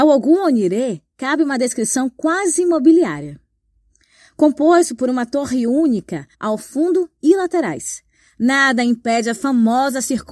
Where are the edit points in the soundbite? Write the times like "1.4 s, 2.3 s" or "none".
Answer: 6.3 s